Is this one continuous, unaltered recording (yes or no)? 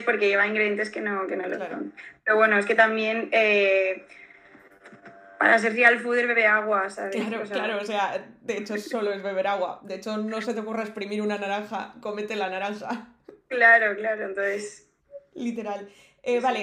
yes